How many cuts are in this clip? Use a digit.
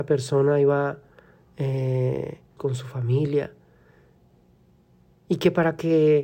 1